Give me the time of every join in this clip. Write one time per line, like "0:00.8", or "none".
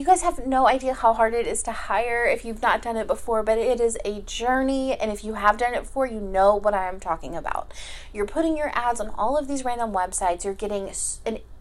none